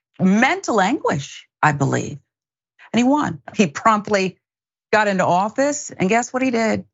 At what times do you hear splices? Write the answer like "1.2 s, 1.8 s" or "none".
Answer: 3.5 s